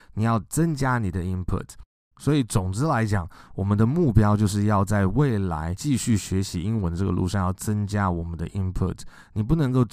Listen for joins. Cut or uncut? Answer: cut